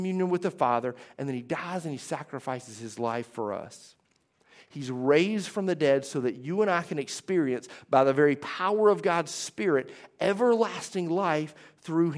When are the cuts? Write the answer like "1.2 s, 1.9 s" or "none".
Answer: none